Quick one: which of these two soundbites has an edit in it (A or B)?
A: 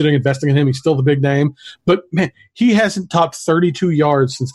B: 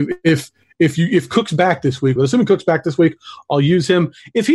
B